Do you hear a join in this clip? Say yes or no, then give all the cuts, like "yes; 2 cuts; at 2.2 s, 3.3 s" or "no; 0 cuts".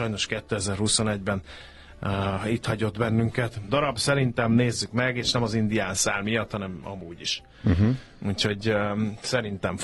yes; 1 cut; at 3.7 s